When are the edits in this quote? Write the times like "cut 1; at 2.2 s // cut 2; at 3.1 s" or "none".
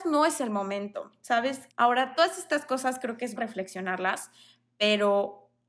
cut 1; at 1.7 s // cut 2; at 3.4 s